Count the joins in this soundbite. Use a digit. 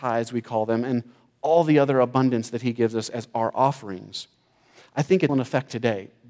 1